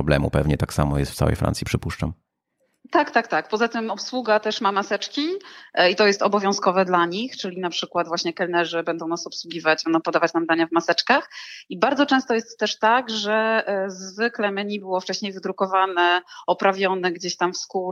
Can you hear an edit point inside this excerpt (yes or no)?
no